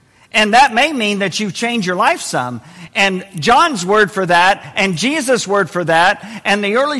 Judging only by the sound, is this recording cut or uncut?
uncut